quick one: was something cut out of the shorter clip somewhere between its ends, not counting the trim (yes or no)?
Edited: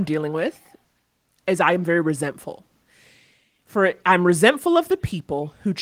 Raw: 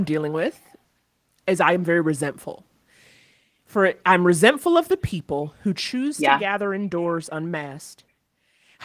no